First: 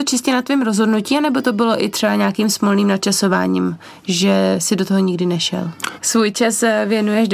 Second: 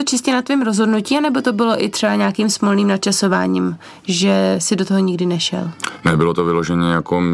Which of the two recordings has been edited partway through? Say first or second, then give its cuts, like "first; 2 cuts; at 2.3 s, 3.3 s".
first; 1 cut; at 6.0 s